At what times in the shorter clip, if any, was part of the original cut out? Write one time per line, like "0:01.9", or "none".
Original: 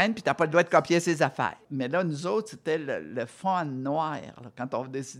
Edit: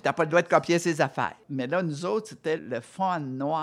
0:02.6